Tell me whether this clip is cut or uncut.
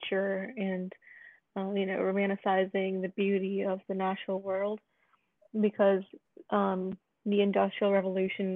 uncut